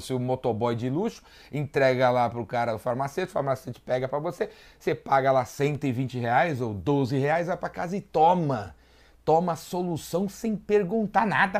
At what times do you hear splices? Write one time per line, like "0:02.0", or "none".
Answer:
none